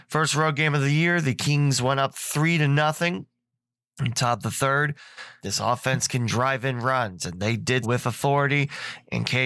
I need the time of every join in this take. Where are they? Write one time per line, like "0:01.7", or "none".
0:05.4
0:07.8